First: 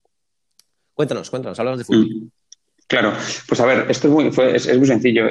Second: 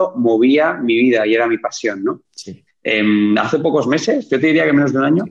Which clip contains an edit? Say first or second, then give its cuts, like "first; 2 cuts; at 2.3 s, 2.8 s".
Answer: second; 1 cut; at 2.7 s